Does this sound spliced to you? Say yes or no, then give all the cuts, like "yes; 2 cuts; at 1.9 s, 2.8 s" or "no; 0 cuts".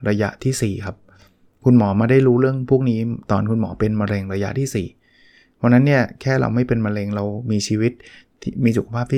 no; 0 cuts